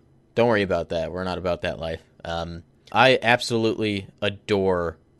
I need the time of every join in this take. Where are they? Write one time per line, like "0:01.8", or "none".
0:02.9